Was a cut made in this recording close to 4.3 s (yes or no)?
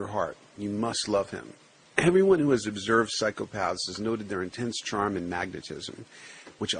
no